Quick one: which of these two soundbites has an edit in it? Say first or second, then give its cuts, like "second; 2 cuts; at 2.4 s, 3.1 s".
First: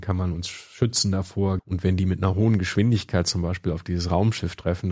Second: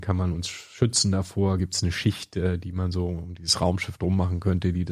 first; 1 cut; at 1.6 s